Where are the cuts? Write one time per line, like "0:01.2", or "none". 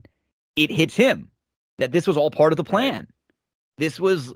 none

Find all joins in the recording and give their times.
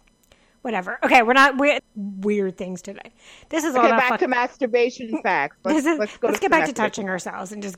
0:01.8

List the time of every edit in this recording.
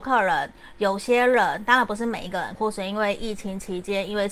0:02.6

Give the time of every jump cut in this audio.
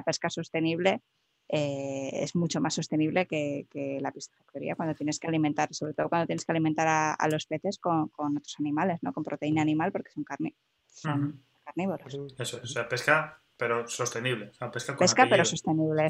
none

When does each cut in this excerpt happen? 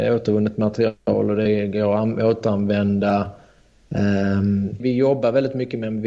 0:04.8

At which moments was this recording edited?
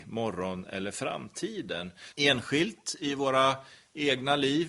0:02.1

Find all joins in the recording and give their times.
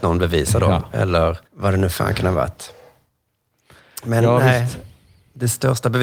0:01.4

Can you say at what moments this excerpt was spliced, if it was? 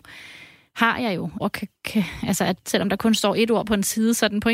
0:01.4

